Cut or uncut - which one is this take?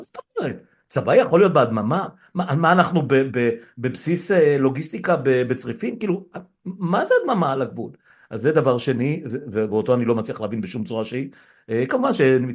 uncut